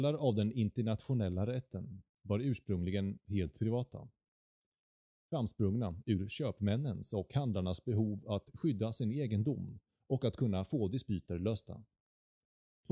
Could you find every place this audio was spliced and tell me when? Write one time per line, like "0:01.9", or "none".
none